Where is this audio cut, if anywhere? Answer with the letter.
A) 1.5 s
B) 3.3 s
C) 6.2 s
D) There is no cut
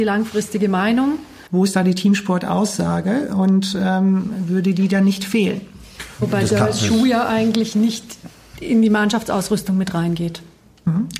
A